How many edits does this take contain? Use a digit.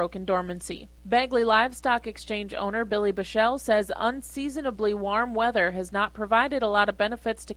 1